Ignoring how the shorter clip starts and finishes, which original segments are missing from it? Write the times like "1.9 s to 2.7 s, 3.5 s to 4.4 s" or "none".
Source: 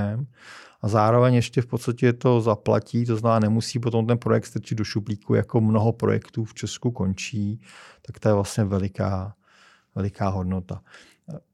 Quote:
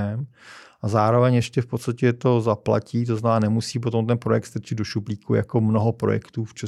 none